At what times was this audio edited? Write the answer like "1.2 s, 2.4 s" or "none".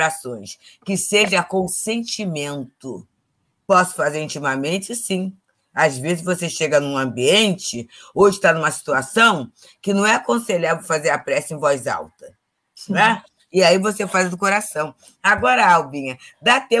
none

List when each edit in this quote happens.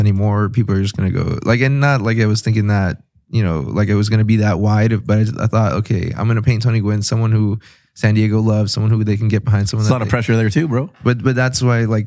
none

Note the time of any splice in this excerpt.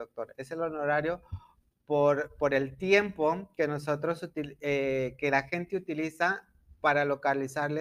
none

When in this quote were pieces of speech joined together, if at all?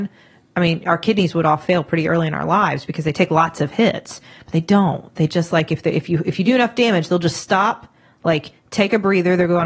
none

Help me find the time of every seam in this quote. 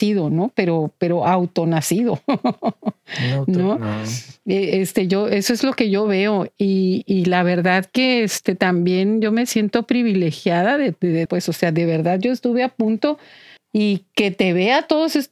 11.3 s, 13.6 s

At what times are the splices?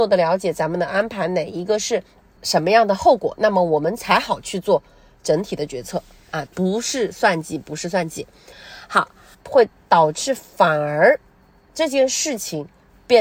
6.5 s, 9.3 s

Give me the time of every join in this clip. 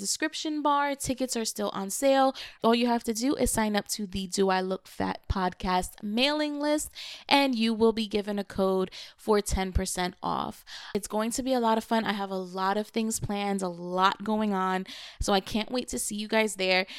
2.6 s

